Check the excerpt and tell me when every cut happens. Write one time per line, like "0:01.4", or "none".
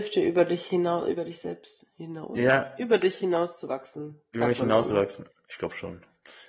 none